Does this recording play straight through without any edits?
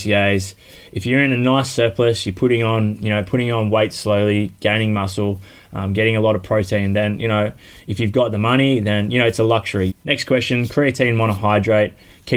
no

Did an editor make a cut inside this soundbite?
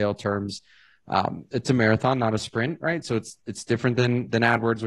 yes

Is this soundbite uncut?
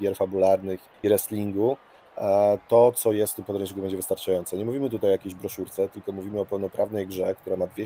no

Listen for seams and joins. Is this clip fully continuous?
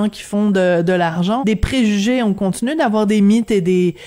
no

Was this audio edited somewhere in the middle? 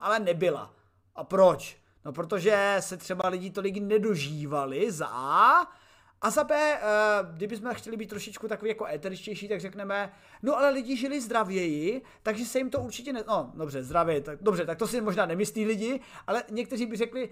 no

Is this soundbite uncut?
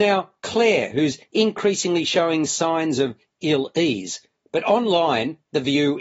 no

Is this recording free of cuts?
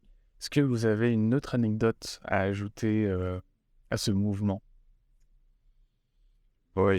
yes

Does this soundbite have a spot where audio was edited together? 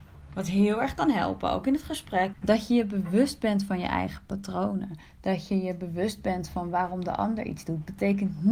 yes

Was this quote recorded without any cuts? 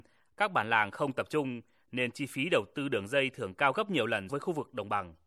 no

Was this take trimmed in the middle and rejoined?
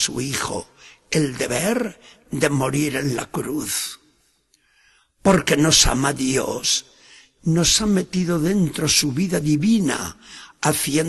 no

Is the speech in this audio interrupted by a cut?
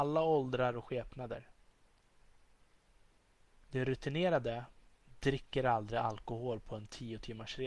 no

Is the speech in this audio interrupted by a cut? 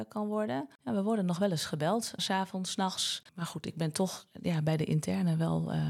yes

